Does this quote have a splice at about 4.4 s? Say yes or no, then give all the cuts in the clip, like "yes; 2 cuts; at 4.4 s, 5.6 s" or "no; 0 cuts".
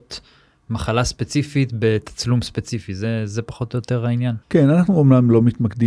yes; 1 cut; at 4.4 s